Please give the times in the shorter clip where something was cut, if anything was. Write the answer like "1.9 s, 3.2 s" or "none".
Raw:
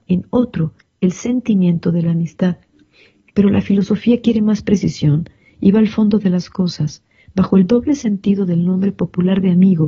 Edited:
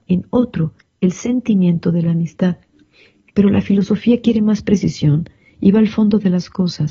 none

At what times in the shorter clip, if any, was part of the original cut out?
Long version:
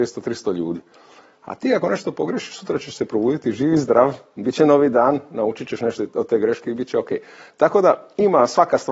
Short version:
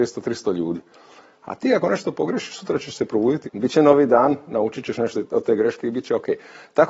3.4 s

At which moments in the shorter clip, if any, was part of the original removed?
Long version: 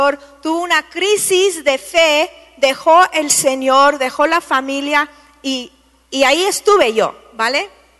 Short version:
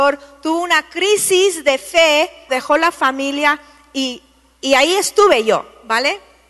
2.5 s

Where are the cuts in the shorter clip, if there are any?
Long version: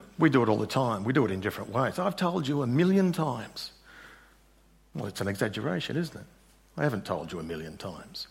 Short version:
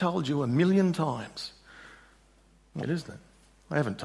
2.8 s

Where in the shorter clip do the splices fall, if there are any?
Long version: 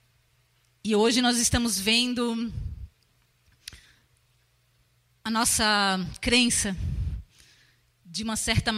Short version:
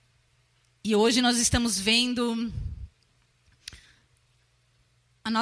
none

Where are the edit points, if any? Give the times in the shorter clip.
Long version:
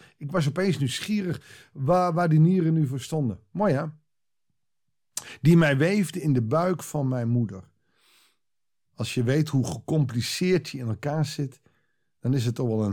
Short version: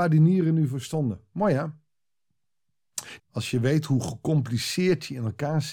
3.2 s

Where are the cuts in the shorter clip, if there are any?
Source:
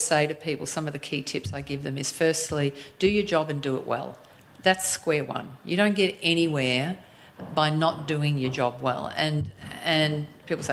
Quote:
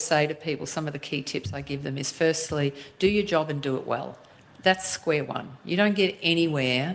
none

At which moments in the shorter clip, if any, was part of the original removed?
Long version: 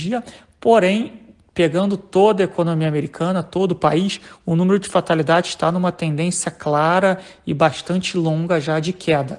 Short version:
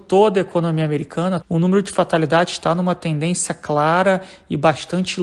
1.4 s

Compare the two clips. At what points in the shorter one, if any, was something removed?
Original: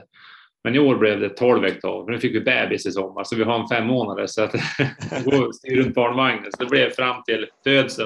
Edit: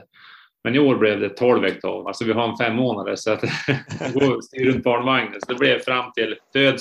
2.0 s

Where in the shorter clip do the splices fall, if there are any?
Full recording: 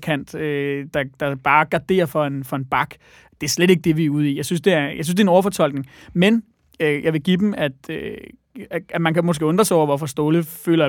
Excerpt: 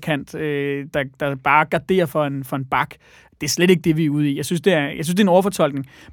none

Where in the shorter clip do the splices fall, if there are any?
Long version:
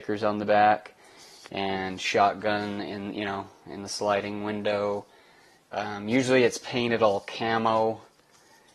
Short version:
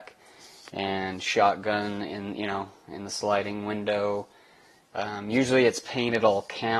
none

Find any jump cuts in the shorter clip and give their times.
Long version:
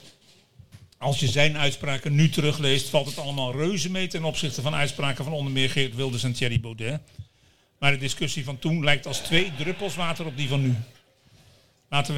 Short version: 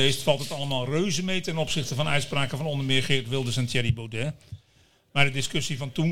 none

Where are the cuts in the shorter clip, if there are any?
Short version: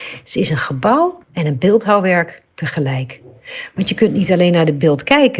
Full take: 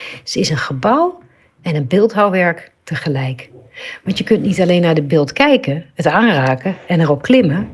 1.2 s

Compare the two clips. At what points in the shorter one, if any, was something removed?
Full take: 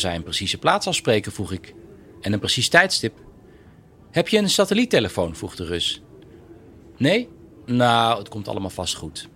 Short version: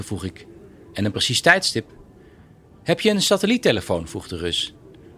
none

